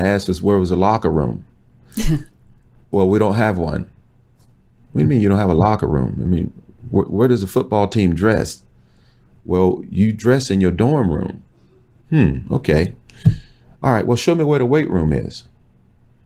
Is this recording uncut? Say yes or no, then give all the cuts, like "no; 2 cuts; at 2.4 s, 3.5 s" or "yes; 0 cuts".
yes; 0 cuts